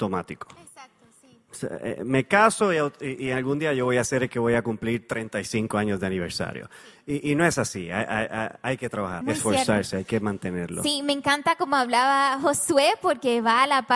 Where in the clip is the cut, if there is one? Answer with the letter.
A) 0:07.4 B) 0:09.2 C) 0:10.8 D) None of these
B